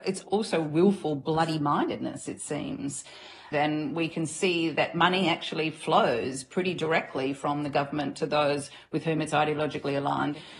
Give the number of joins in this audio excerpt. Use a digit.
1